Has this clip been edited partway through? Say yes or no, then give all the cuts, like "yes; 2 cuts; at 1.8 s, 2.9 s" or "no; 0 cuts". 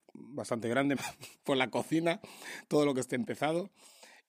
yes; 1 cut; at 1.0 s